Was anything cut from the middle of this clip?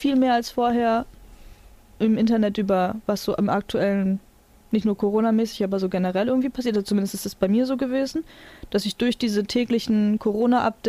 no; 0 cuts

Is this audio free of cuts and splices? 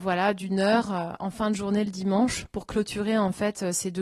yes; 0 cuts

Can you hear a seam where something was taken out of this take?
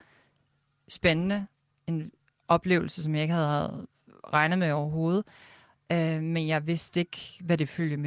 no; 0 cuts

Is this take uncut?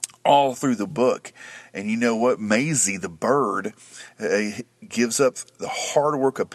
yes; 0 cuts

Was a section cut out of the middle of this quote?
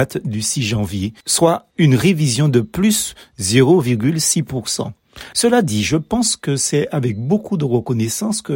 yes; 2 cuts; at 1.7 s, 5.3 s

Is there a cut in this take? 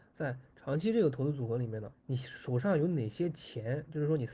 yes; 1 cut; at 1.9 s

